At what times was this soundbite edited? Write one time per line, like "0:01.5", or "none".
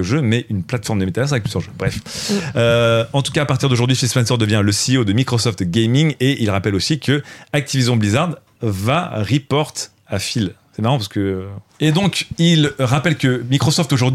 0:11.7

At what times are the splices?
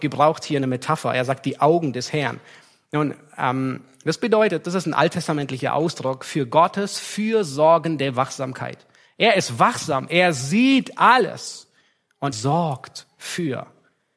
0:12.3

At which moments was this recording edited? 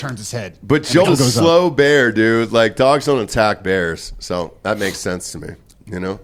0:01.0

